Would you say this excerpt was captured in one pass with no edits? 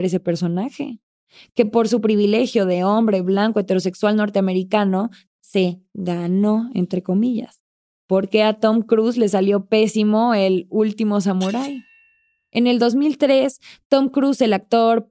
yes; 0 cuts

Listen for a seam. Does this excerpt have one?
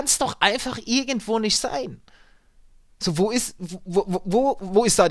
no; 0 cuts

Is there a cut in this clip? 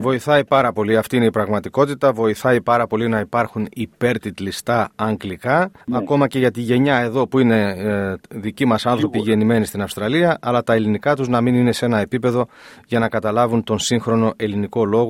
yes; 1 cut; at 5.8 s

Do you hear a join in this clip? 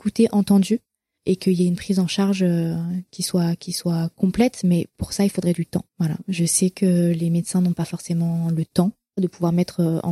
yes; 1 cut; at 5.9 s

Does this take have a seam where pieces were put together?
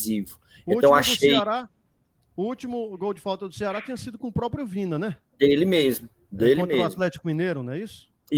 no; 0 cuts

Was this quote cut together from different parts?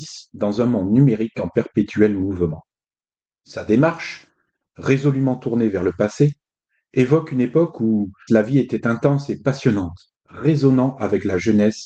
yes; 2 cuts; at 8.3 s, 10.2 s

